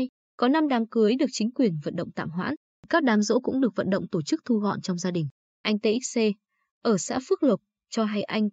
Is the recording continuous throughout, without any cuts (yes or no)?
yes